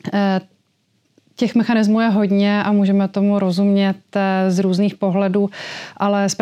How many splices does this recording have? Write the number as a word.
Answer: zero